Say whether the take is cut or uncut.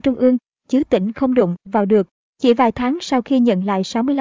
cut